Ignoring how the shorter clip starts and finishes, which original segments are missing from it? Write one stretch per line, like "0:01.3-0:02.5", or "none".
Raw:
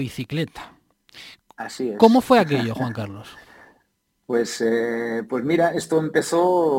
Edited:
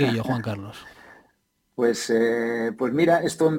none